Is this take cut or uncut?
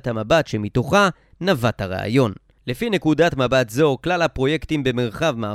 uncut